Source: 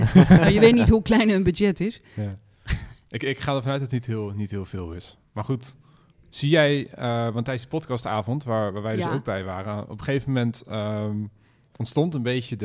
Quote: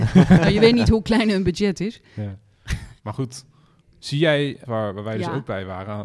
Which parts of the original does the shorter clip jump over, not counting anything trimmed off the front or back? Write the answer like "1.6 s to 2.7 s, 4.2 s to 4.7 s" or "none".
3.0 s to 5.3 s, 7.0 s to 8.4 s